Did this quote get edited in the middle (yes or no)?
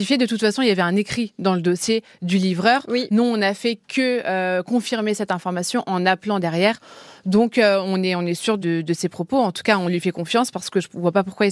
yes